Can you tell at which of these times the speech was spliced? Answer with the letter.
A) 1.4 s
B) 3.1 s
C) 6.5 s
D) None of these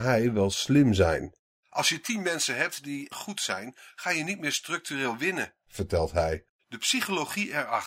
B